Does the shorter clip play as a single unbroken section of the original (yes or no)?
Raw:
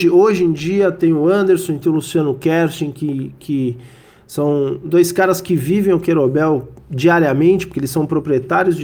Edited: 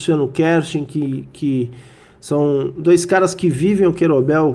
yes